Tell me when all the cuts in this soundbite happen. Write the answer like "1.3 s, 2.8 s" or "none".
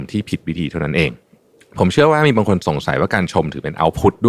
none